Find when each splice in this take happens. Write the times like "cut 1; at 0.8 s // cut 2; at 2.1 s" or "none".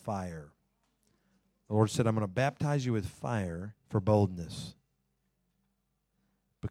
cut 1; at 3.8 s